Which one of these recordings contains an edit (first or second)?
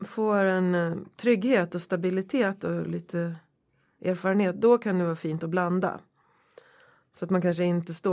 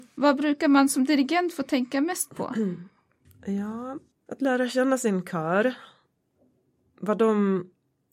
second